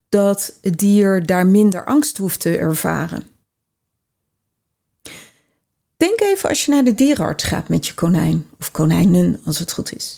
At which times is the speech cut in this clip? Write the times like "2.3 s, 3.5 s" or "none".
none